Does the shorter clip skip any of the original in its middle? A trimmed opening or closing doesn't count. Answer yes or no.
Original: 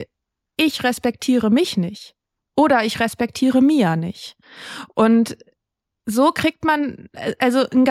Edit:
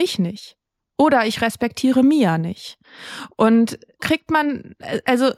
yes